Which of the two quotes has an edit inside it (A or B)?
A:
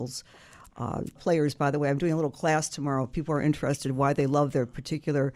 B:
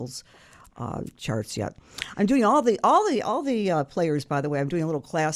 A